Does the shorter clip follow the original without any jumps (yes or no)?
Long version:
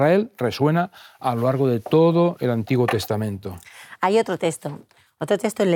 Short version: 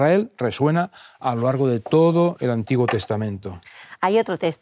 yes